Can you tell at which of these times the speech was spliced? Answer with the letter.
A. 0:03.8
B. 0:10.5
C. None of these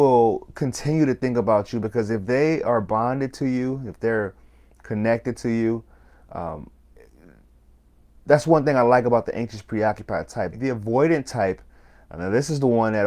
B